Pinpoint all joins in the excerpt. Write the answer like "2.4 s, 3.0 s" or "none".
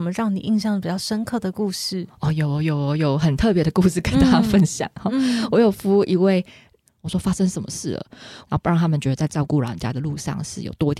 6.9 s, 8.4 s